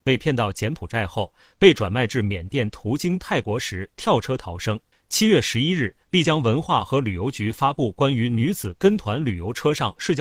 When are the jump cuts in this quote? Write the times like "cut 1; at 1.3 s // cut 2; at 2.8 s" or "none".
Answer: cut 1; at 4.9 s